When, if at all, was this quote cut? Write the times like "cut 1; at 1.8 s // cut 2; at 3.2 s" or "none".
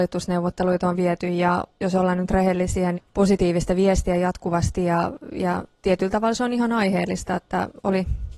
cut 1; at 2.9 s